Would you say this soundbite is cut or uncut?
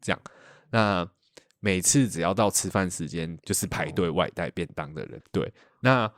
cut